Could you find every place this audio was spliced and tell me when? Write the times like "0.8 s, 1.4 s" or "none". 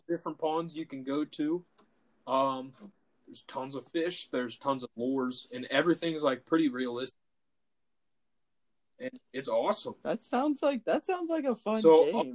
none